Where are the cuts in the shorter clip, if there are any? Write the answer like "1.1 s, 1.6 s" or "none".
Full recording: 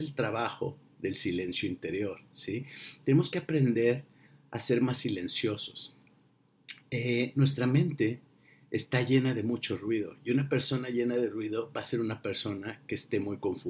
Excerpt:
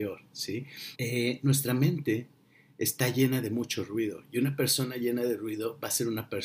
0.9 s